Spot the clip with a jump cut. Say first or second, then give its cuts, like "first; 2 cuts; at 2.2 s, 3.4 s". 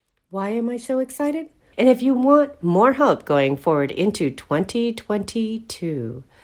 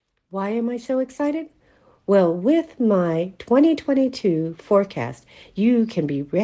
first; 1 cut; at 1.7 s